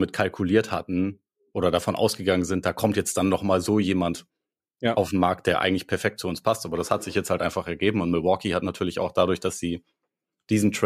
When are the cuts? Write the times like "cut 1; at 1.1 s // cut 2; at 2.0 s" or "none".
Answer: none